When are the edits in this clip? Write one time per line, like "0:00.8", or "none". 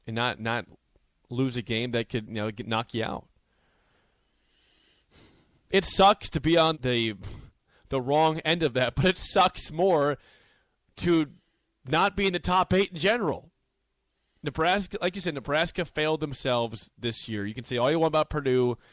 0:06.7